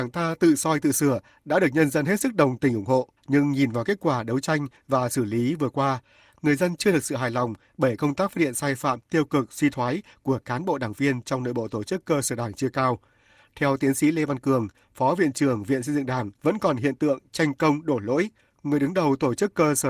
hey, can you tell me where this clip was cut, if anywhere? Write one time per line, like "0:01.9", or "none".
0:03.2
0:13.4
0:16.4

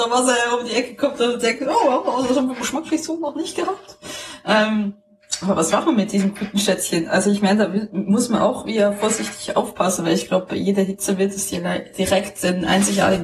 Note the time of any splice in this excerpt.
none

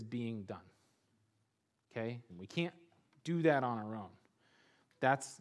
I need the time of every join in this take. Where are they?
0:02.3

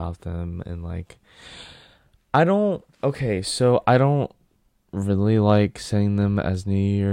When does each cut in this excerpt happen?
0:02.9

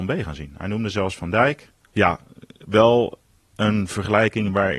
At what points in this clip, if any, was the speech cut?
0:01.8

